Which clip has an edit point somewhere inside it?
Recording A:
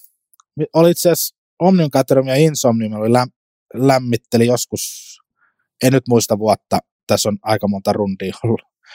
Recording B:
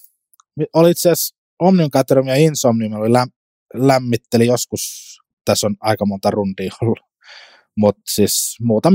B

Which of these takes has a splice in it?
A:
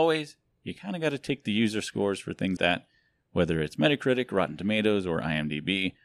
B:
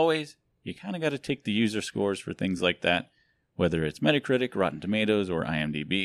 A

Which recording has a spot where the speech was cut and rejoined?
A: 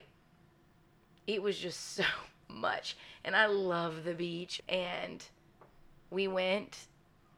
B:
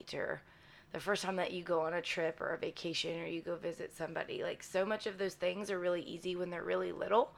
A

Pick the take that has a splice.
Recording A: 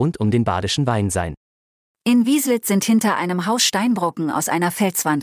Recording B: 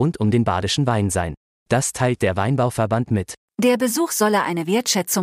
B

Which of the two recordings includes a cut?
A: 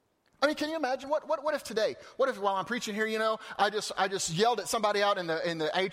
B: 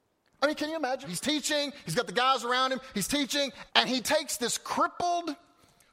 B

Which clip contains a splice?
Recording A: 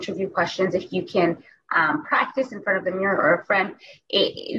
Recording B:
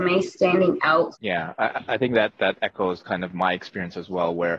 B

